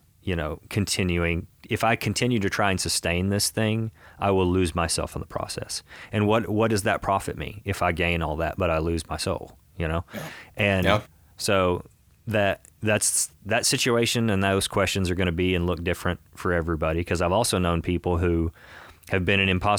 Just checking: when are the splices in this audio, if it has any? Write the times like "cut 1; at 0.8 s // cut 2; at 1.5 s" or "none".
none